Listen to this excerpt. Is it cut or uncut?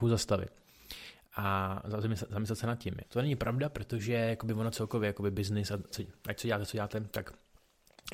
cut